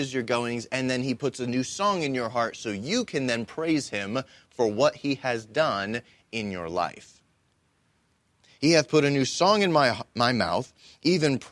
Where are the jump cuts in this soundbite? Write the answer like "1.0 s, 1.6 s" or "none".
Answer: none